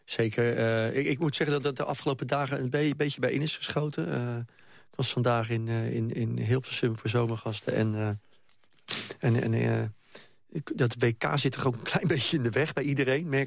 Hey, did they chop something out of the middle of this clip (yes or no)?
no